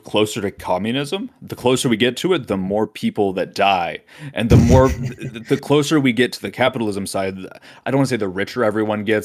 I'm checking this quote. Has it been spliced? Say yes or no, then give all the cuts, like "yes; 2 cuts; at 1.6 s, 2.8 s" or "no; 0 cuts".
no; 0 cuts